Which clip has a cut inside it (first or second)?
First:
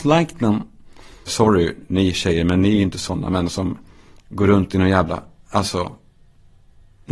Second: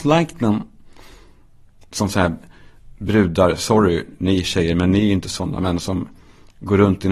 first